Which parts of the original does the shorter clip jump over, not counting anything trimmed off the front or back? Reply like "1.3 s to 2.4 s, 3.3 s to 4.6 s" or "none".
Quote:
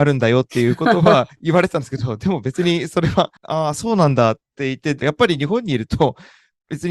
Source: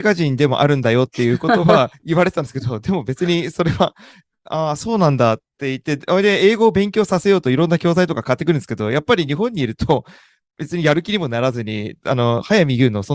4.0 s to 4.4 s, 6.0 s to 8.9 s